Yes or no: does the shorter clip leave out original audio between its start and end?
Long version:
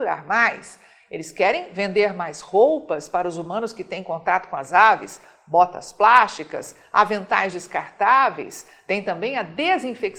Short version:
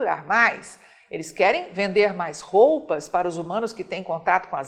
no